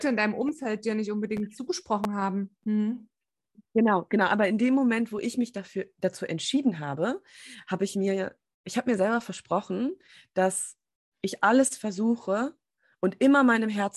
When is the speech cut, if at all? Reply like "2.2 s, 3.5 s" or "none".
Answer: none